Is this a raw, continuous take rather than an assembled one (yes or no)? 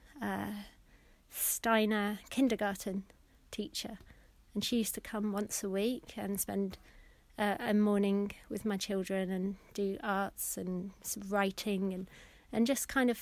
yes